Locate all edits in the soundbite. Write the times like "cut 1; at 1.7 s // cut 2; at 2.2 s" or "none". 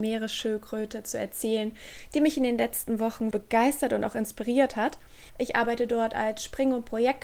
cut 1; at 3.3 s // cut 2; at 5.3 s

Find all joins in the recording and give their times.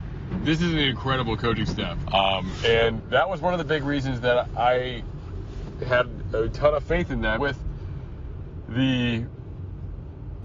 cut 1; at 2.0 s // cut 2; at 7.4 s

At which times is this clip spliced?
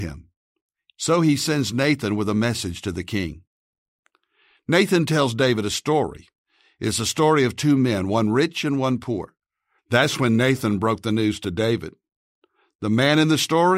cut 1; at 9.8 s

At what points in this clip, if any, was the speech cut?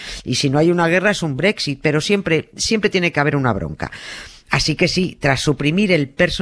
none

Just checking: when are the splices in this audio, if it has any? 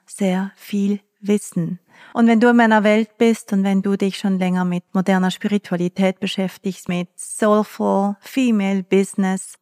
cut 1; at 2.1 s // cut 2; at 6.9 s

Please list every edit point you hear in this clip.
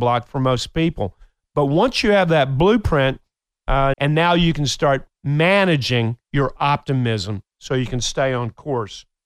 cut 1; at 3.9 s // cut 2; at 6.3 s

